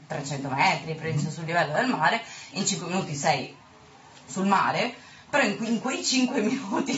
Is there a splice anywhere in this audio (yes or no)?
yes